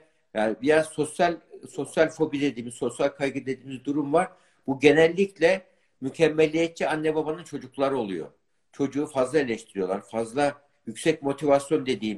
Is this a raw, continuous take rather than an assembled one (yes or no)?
yes